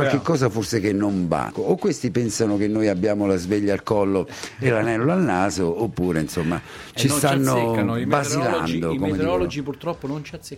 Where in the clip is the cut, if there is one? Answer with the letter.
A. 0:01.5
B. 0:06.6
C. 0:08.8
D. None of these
A